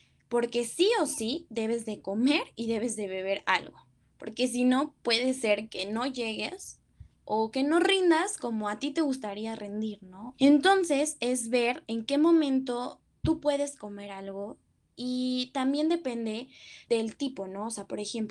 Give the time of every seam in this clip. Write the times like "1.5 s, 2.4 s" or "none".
10.3 s, 16.9 s